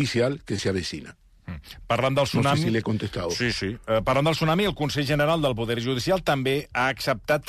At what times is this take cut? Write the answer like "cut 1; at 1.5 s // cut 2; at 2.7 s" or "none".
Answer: none